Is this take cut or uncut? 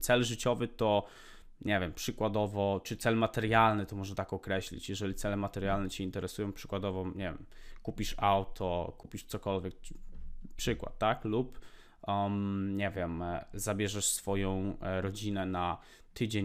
uncut